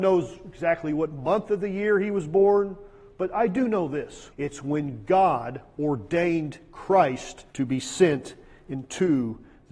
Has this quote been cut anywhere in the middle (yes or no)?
yes